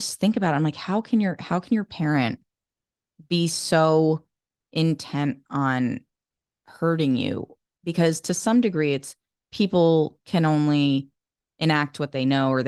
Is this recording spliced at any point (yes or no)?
no